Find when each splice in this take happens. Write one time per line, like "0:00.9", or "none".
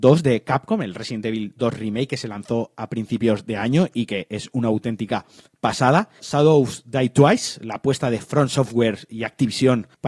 0:06.2

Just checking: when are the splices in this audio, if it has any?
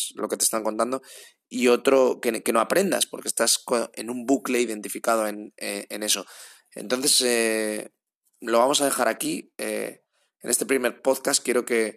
none

